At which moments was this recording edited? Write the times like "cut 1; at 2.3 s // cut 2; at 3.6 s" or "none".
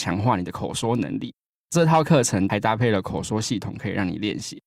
none